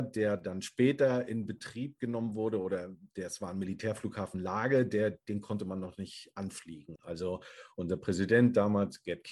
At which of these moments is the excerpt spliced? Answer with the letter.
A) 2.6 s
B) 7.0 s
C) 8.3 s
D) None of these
B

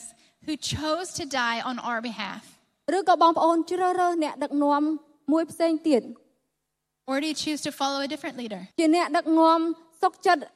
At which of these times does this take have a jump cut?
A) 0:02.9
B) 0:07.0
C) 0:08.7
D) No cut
C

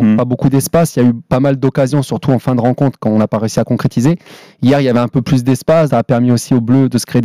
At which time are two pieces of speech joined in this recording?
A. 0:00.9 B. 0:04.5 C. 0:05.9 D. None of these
C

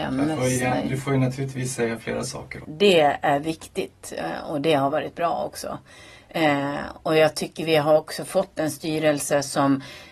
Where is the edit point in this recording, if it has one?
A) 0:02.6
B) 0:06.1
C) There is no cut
A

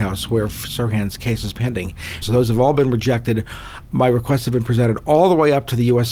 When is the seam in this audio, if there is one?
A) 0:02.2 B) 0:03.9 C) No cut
A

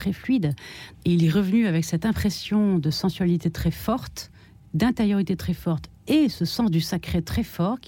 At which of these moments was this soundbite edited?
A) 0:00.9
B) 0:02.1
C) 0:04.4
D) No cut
A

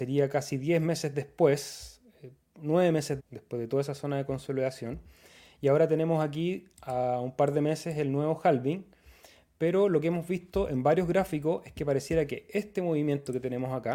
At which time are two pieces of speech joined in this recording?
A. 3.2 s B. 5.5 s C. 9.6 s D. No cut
A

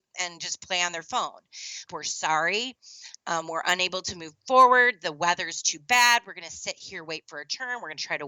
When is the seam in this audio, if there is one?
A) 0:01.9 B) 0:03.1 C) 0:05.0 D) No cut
A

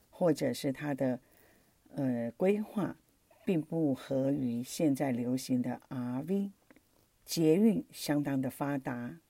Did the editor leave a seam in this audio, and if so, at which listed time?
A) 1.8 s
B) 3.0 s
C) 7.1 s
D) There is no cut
C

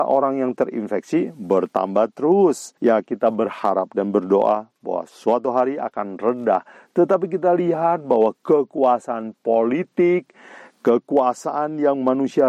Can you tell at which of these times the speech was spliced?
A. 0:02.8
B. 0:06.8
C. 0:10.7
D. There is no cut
A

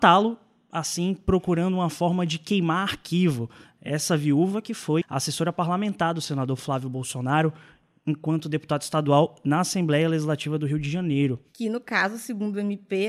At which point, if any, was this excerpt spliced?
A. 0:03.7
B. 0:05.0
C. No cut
B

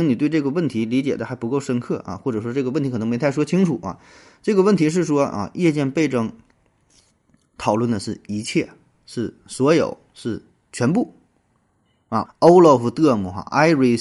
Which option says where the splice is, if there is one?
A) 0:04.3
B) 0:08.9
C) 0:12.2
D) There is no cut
C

